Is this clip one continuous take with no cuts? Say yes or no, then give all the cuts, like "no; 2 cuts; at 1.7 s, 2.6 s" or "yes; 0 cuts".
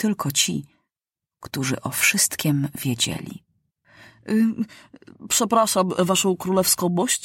yes; 0 cuts